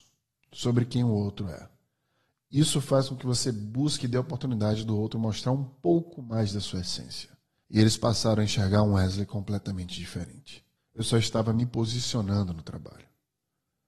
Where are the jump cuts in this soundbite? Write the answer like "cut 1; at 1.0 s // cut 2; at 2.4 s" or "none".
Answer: cut 1; at 7.6 s // cut 2; at 10.8 s